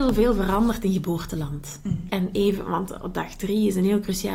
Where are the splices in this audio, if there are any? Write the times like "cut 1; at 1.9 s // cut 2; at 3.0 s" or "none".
cut 1; at 2.1 s